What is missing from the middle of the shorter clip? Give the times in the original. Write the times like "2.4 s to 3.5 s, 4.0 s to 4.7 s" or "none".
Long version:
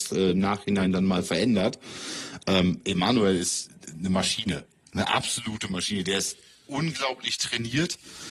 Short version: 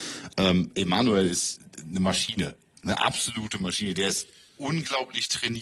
none